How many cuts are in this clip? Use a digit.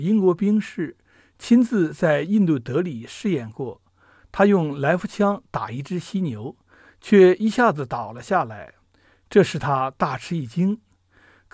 0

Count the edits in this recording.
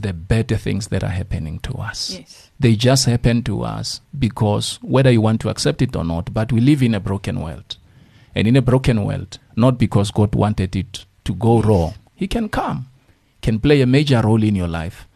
2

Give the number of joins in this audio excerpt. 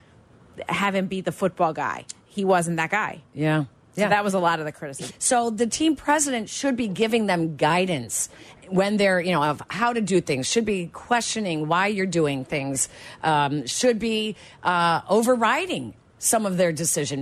1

